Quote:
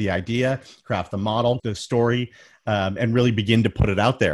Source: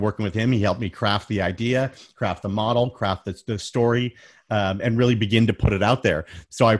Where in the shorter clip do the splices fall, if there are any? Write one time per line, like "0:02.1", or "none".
0:01.6